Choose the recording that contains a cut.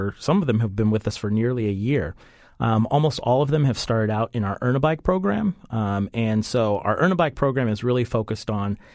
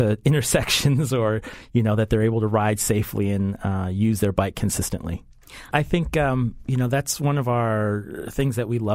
second; 1 cut; at 5.7 s

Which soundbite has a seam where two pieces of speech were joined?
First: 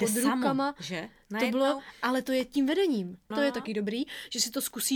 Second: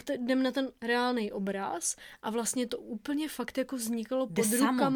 first; 1 cut; at 3.3 s

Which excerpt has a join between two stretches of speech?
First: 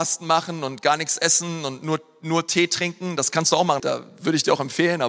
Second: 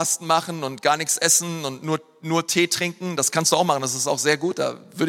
first; 1 cut; at 3.8 s

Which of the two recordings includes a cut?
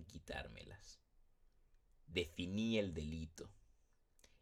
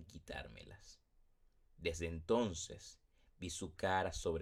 second; 1 cut; at 1.6 s

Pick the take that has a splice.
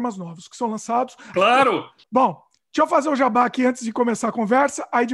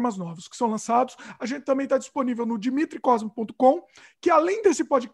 first; 1 cut; at 1.3 s

